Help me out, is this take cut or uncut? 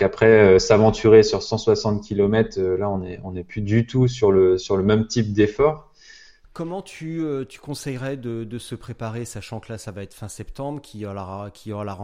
cut